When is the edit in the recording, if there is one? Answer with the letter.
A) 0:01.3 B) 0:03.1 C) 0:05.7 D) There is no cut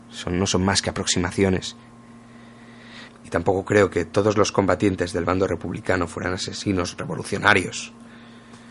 B